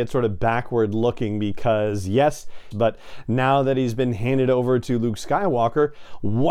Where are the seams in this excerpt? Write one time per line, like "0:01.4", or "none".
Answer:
0:02.7